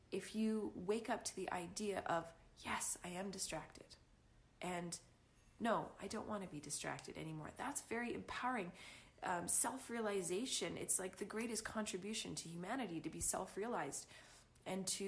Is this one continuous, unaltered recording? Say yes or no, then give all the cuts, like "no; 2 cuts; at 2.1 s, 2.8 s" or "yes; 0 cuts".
yes; 0 cuts